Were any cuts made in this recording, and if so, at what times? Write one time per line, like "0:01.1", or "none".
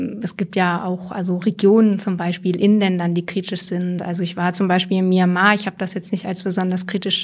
none